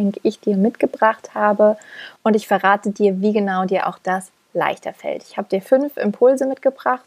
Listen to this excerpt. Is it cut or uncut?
cut